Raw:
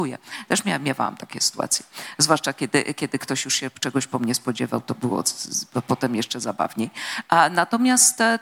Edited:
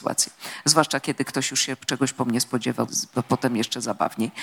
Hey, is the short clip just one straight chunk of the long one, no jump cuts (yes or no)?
no